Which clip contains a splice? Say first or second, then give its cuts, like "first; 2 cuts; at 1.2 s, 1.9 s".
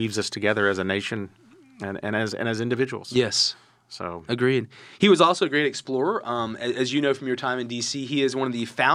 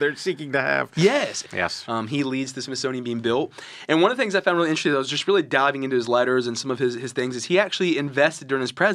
second; 1 cut; at 1.4 s